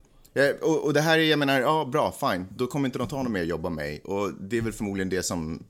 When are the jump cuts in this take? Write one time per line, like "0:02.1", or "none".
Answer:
none